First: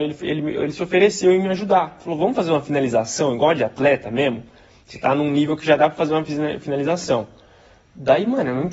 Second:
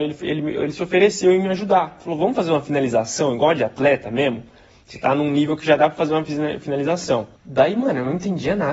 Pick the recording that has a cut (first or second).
second